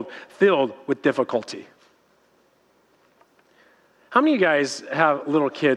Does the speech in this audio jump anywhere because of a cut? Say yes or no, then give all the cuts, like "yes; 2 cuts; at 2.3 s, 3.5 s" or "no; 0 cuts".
no; 0 cuts